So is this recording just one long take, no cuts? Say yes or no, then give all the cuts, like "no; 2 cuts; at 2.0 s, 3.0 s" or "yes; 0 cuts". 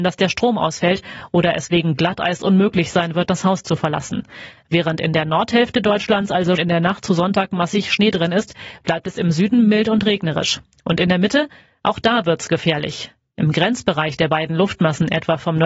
no; 1 cut; at 6.6 s